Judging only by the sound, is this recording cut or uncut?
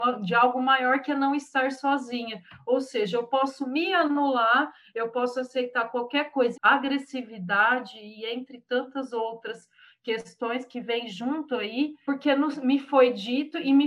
cut